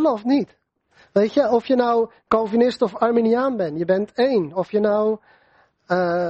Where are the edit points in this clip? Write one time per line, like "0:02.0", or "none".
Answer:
0:02.3